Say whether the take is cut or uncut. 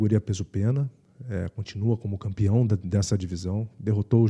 uncut